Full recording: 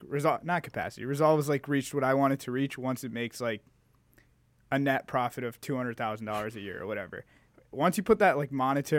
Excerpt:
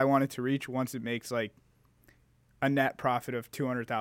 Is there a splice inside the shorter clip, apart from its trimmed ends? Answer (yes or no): no